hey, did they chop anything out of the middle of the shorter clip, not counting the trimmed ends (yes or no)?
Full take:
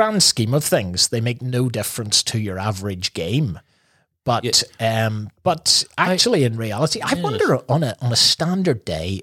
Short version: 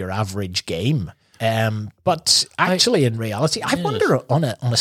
yes